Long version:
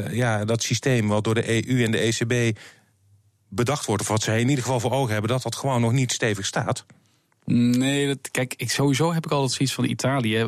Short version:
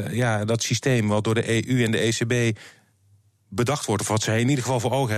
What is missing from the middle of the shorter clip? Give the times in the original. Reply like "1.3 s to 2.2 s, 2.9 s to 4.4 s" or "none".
none